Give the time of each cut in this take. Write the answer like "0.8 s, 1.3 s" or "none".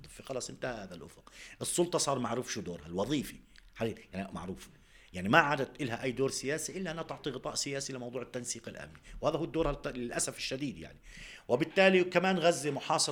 4.3 s